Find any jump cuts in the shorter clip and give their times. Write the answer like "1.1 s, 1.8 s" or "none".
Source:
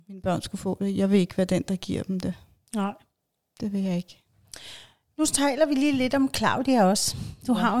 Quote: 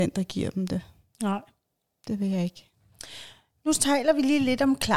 none